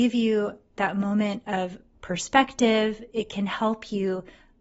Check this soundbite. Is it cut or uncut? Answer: uncut